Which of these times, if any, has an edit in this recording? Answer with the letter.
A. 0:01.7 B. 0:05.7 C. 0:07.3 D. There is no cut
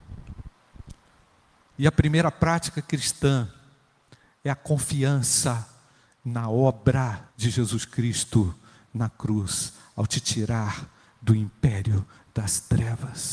C